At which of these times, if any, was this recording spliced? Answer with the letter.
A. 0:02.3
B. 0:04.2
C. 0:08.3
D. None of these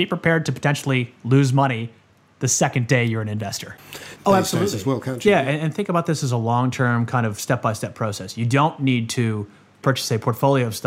B